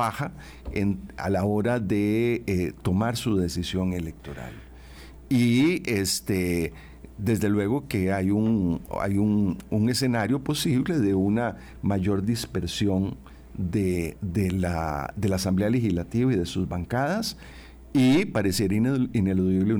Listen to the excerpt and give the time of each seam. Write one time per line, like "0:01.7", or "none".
none